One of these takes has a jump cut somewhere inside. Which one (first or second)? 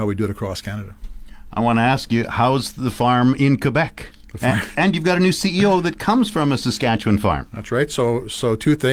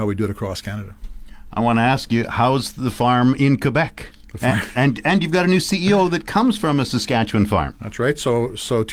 first